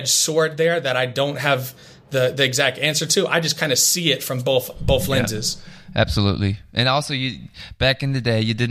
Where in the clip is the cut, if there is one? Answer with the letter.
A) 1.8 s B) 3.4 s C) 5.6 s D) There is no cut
D